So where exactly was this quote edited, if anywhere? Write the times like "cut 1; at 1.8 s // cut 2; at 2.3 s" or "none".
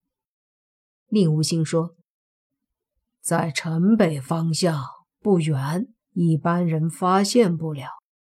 cut 1; at 6.0 s